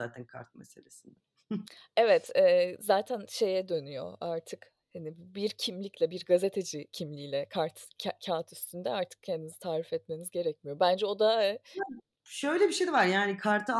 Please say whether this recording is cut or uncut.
uncut